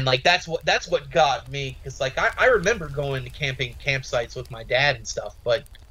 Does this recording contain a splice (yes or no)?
no